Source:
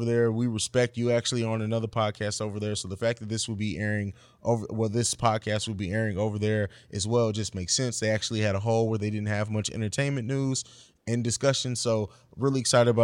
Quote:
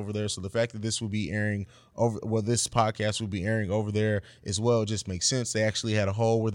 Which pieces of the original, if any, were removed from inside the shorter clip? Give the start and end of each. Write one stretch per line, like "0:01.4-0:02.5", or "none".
none